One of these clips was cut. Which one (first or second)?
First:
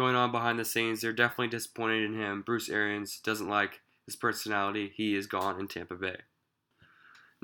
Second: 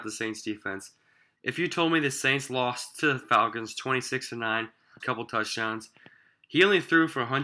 second